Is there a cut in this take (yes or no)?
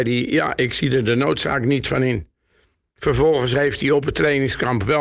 no